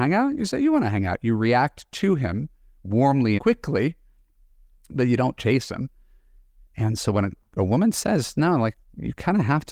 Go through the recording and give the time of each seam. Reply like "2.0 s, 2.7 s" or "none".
3.4 s